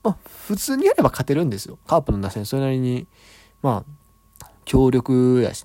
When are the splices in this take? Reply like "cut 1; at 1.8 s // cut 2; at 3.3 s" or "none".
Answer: cut 1; at 1.8 s